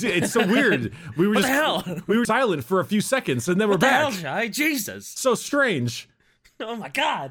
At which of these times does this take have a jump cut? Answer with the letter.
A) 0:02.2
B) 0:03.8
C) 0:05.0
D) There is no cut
A